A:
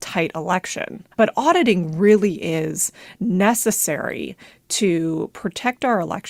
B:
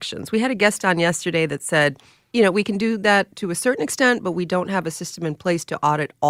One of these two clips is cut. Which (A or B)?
A